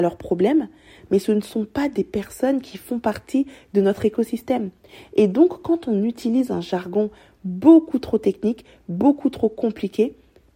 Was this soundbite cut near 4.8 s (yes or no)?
no